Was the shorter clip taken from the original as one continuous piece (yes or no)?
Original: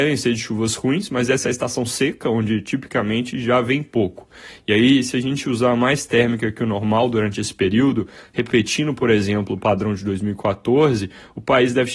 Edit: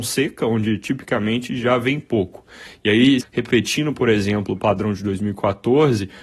no